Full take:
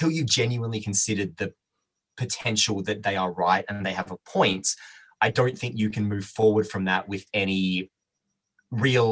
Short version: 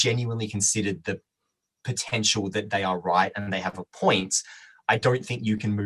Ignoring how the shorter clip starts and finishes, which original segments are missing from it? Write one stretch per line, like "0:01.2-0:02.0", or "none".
none